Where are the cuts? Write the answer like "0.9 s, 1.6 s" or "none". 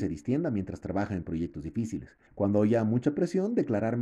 2.3 s

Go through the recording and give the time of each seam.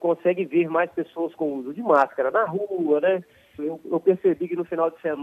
3.6 s

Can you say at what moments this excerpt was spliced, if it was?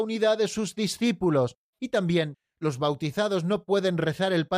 1.7 s

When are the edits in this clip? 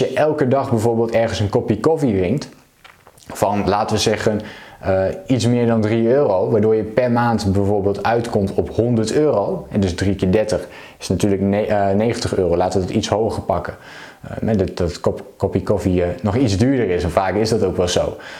none

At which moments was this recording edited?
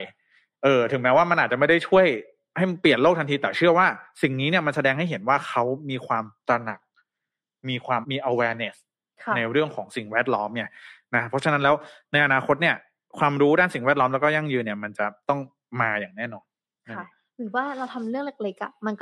8.0 s

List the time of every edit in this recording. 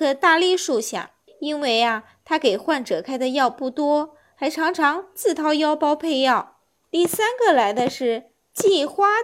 1.3 s, 6.8 s

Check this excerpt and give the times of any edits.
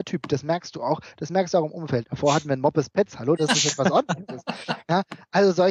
2.0 s, 3.4 s

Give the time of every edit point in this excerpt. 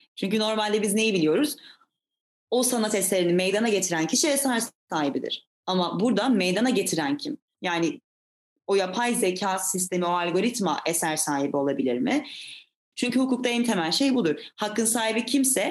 7.5 s, 12.9 s

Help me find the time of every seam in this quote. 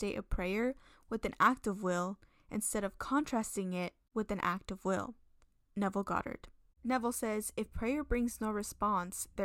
none

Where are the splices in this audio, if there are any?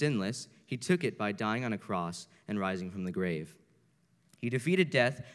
4.3 s

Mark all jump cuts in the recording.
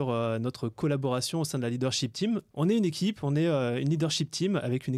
2.5 s

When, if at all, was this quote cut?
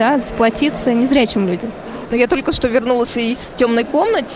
2.1 s

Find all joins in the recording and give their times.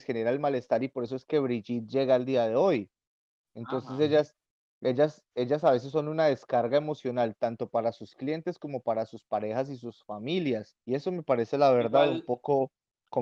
3.4 s, 10.8 s

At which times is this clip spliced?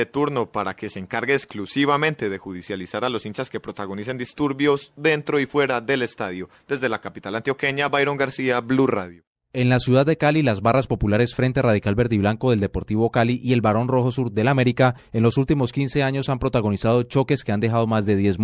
none

